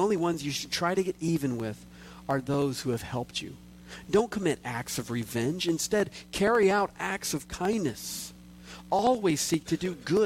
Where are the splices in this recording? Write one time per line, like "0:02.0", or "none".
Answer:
none